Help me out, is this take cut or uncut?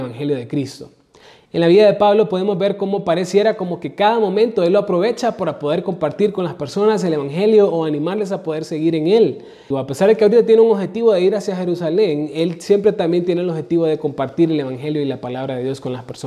cut